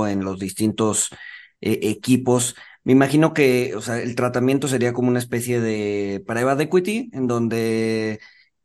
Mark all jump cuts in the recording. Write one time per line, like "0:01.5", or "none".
none

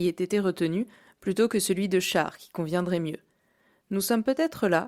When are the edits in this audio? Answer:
none

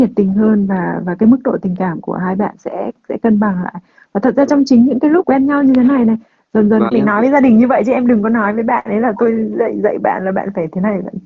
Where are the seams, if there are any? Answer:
0:06.9

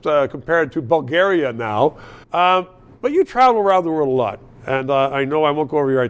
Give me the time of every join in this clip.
0:02.2

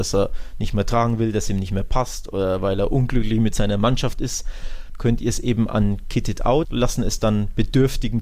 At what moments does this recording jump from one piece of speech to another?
0:04.9
0:06.6

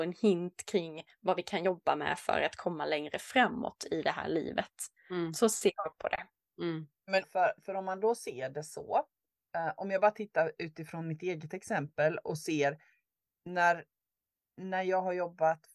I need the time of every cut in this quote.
0:07.2

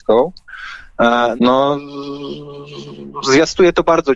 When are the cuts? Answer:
0:01.4

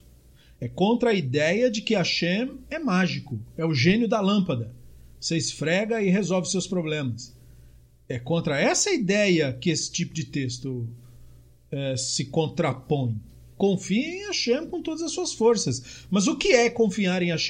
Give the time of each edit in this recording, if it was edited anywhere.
0:13.5

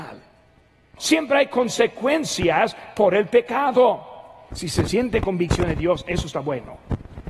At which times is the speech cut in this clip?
0:01.0
0:04.5

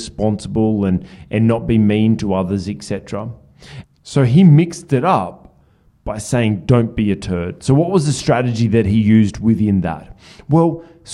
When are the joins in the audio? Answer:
0:03.8

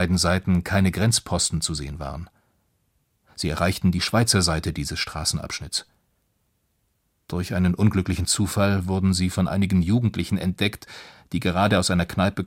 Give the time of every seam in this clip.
none

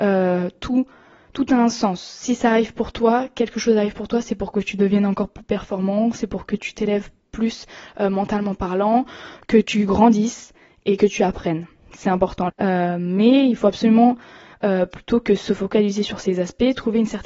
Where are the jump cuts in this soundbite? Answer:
0:12.5

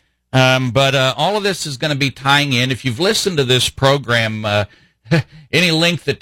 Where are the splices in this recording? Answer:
none

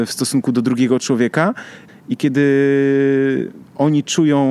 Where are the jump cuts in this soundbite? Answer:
0:01.9

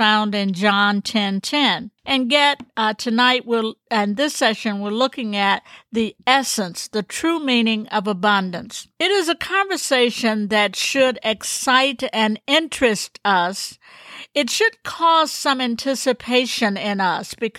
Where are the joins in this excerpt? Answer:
0:02.0

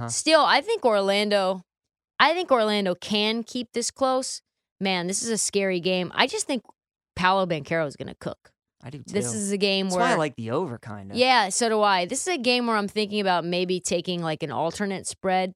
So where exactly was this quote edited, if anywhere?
none

